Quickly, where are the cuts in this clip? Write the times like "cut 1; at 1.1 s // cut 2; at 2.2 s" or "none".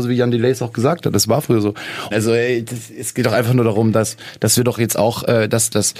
cut 1; at 2.1 s